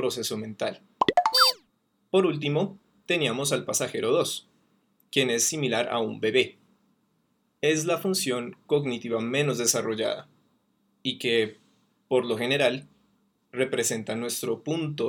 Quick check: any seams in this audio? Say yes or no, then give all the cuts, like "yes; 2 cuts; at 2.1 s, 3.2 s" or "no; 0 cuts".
no; 0 cuts